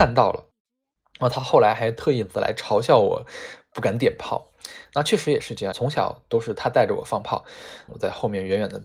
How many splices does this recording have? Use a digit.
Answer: 2